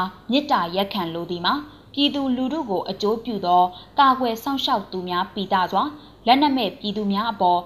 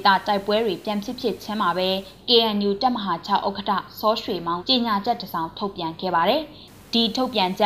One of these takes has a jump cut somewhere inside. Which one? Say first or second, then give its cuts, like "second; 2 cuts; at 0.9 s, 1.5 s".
second; 1 cut; at 4.6 s